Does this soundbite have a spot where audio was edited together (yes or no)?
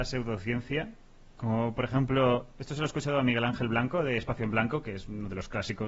no